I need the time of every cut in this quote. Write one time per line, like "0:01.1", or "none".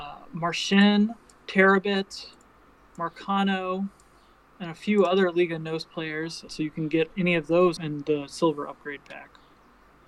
0:06.5
0:07.8